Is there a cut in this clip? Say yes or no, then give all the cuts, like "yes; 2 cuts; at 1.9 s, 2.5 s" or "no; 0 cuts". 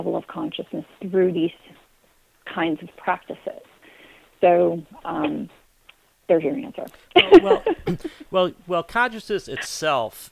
no; 0 cuts